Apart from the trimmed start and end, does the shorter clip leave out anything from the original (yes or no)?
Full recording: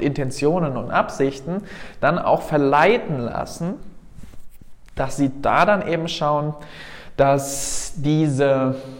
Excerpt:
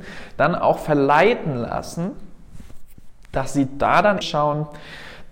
yes